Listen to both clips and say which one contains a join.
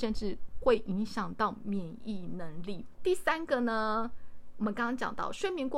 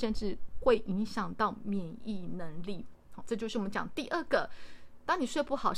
first; 1 cut; at 3.0 s

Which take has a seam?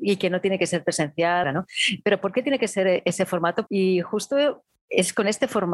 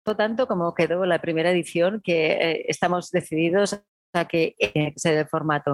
first; 2 cuts; at 1.4 s, 3.7 s

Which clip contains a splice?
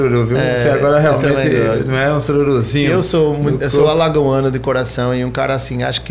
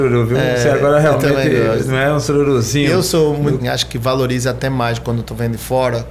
second; 1 cut; at 3.6 s

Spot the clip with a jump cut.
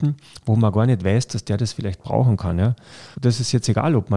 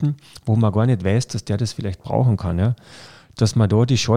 first; 1 cut; at 3.1 s

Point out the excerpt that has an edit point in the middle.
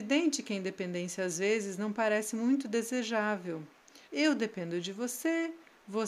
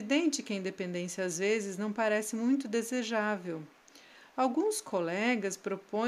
first; 1 cut; at 4.1 s

